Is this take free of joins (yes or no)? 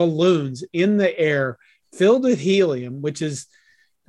yes